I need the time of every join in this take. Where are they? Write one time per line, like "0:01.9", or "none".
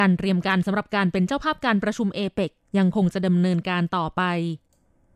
none